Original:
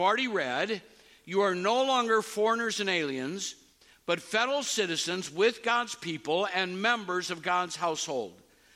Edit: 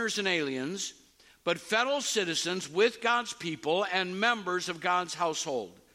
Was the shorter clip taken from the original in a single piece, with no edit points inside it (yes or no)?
yes